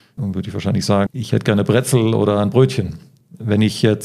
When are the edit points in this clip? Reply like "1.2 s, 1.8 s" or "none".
1.1 s